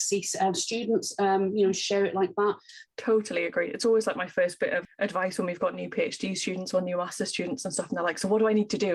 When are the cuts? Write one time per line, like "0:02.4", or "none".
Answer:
0:02.8